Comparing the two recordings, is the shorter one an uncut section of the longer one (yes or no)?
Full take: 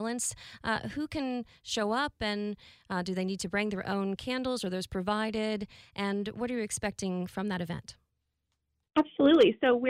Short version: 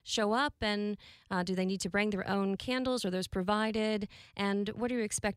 yes